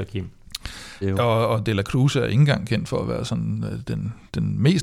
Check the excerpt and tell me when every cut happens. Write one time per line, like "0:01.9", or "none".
0:01.0